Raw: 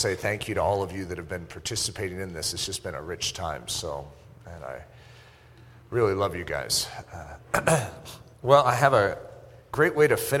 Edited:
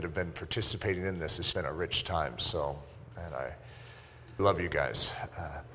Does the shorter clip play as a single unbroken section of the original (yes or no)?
no